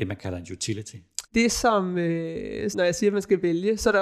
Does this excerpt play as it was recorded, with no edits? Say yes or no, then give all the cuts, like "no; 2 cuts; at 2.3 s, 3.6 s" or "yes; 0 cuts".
no; 2 cuts; at 1.2 s, 2.7 s